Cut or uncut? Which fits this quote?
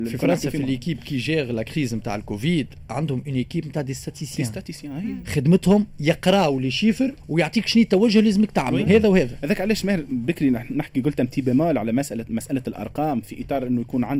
cut